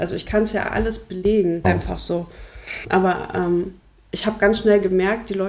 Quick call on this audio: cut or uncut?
cut